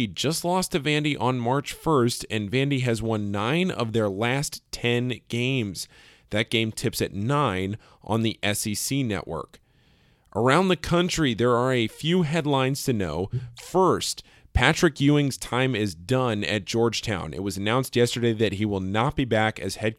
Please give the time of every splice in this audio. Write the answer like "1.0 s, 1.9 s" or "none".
none